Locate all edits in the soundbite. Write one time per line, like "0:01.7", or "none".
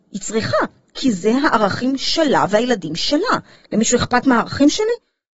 0:03.6